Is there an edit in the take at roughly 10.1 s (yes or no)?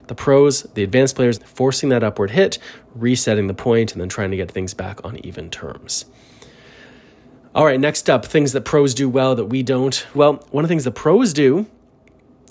yes